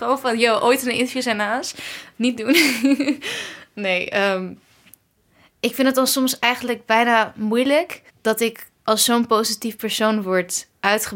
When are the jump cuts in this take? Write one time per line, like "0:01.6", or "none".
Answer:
0:08.1